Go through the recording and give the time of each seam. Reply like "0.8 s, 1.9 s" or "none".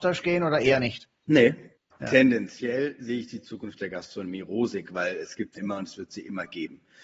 1.9 s, 5.6 s